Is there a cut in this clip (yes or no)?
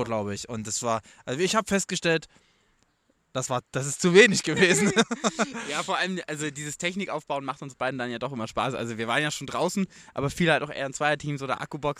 no